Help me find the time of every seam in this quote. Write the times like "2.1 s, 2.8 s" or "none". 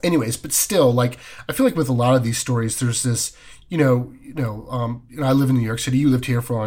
none